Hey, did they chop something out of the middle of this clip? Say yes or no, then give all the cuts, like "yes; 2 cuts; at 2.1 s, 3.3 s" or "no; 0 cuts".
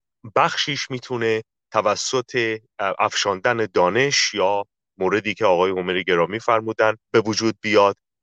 yes; 1 cut; at 7.0 s